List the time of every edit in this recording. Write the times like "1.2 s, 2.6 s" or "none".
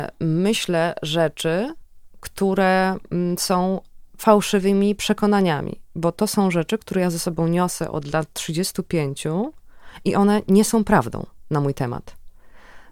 none

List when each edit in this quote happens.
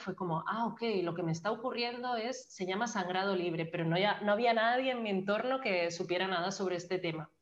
none

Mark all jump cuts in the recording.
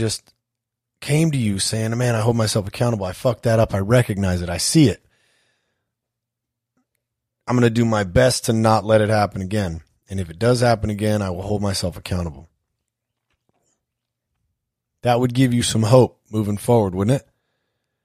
none

